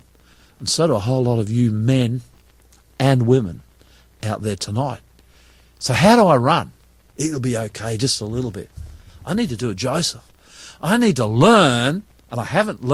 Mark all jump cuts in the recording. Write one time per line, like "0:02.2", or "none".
0:07.1